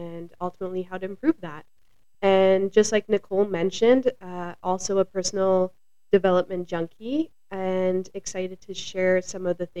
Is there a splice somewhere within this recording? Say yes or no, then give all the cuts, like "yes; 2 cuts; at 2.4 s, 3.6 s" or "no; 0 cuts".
no; 0 cuts